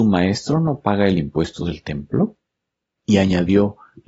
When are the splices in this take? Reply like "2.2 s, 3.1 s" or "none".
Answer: 3.0 s